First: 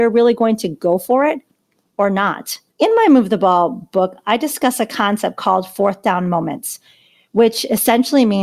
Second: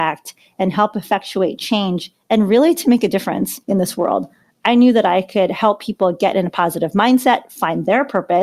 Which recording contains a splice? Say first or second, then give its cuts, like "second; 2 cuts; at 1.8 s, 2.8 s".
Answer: first; 1 cut; at 2.7 s